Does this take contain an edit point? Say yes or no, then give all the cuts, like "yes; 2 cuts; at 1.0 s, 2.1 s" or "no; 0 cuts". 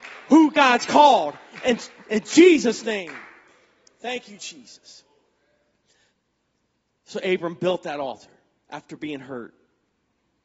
no; 0 cuts